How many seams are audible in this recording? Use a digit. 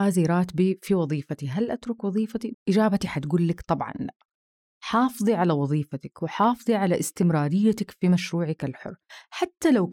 1